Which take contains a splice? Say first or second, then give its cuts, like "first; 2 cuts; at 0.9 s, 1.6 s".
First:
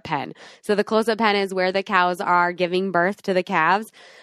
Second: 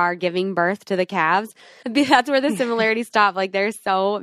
second; 1 cut; at 1.8 s